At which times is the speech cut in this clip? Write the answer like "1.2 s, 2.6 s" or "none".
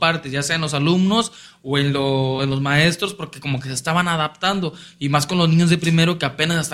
none

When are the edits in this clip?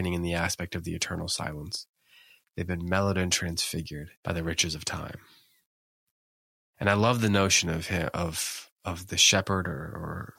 4.2 s

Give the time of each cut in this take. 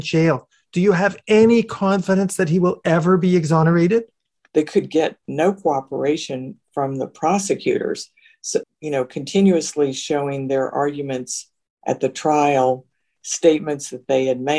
4.5 s, 8.6 s

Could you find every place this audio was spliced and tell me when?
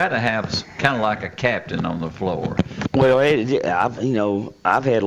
2.8 s, 4.0 s

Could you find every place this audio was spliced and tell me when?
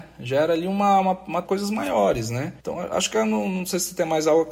1.4 s, 2.6 s

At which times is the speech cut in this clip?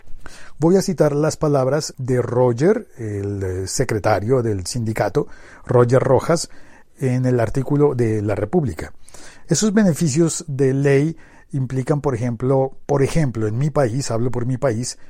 9.4 s

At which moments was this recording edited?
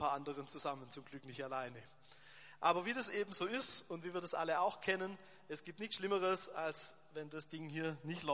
none

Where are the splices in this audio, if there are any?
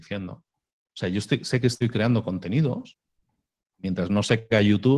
none

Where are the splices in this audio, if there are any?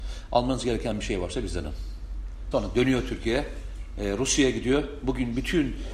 2.5 s

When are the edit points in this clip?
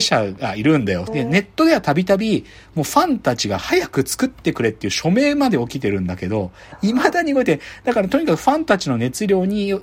1.1 s

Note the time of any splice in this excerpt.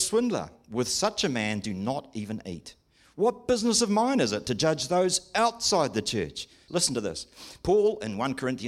6.7 s

